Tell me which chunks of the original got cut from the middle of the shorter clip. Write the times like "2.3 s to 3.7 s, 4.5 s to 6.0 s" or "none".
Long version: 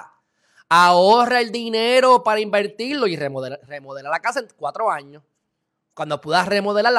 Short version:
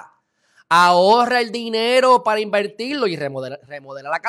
none